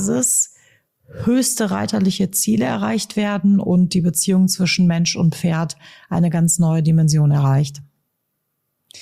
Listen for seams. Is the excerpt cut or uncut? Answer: uncut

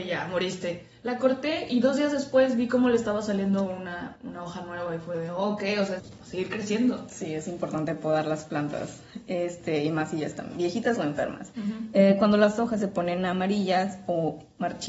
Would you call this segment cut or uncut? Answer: cut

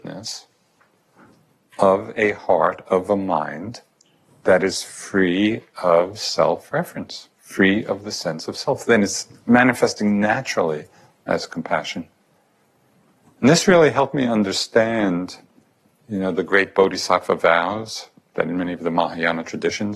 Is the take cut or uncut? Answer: uncut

